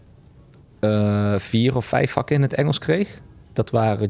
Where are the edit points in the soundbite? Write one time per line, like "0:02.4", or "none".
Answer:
none